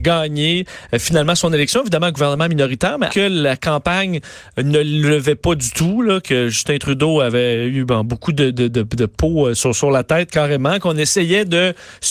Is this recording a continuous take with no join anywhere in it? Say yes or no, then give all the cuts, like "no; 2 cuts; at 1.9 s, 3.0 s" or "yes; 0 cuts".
no; 1 cut; at 3.1 s